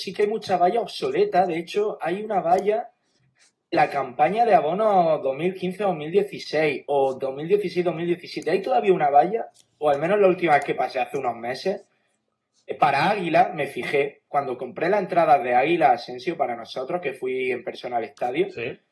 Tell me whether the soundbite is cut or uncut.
uncut